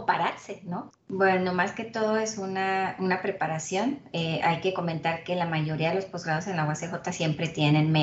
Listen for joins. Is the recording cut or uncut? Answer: cut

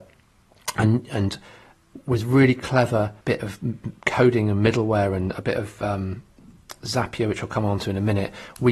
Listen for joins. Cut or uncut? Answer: cut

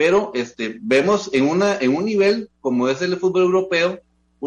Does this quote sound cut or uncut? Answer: uncut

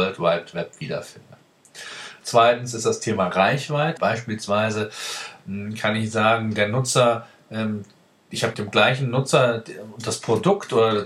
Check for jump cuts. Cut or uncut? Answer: cut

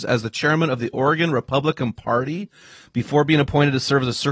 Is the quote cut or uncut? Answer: uncut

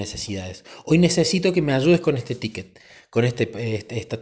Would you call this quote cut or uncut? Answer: uncut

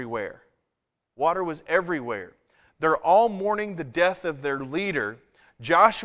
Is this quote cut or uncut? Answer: cut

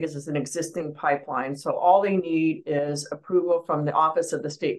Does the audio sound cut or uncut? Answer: uncut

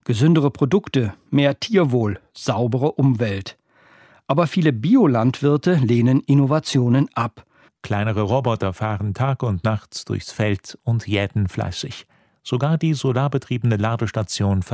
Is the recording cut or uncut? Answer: cut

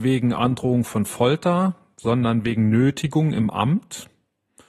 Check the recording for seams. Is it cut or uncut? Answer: uncut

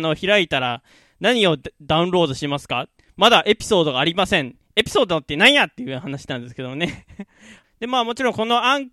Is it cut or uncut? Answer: cut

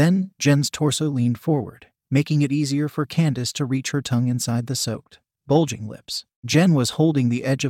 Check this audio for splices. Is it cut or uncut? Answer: uncut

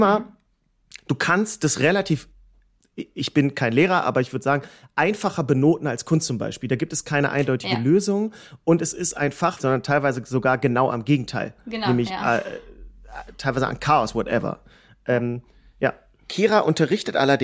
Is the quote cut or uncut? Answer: cut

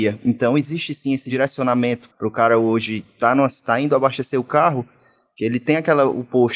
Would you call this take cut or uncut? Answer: uncut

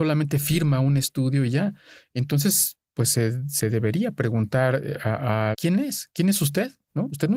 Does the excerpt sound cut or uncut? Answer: cut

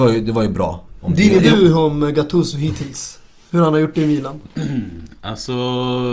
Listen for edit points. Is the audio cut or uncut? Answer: cut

